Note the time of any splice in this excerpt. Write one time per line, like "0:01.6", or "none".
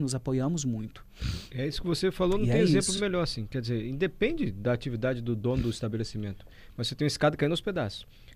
none